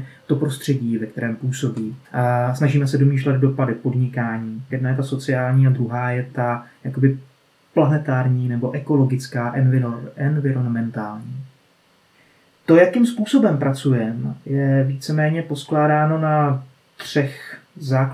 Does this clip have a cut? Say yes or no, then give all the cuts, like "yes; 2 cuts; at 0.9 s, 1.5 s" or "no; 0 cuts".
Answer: yes; 2 cuts; at 2.0 s, 4.7 s